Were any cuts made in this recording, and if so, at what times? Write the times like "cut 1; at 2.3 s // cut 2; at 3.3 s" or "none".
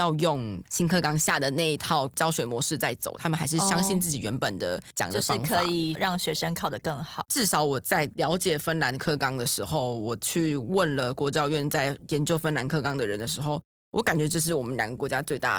cut 1; at 7.2 s